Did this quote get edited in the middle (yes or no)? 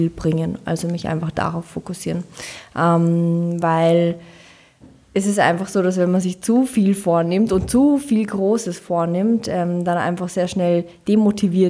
no